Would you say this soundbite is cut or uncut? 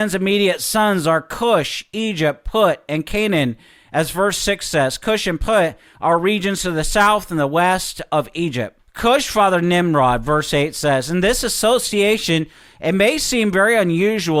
uncut